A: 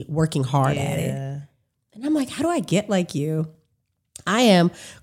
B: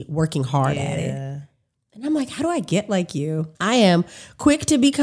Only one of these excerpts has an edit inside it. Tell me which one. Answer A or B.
B